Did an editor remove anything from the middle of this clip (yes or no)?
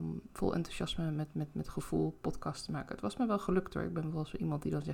no